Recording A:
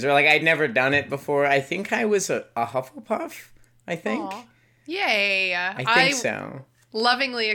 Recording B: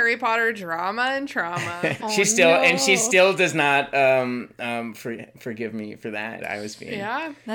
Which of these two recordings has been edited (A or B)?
B